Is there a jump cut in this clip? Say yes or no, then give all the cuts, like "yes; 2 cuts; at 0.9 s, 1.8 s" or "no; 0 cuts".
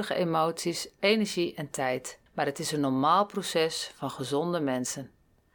yes; 1 cut; at 2.3 s